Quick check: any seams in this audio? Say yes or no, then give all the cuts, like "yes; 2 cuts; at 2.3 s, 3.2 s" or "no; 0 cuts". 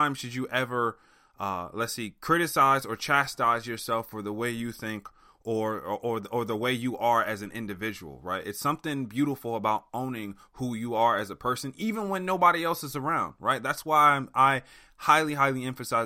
no; 0 cuts